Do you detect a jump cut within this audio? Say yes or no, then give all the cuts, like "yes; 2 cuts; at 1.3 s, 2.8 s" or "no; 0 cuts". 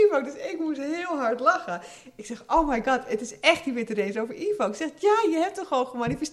no; 0 cuts